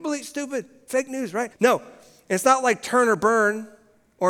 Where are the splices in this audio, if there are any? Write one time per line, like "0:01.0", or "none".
0:01.5